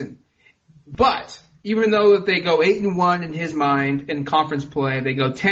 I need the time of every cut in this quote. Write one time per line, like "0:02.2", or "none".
none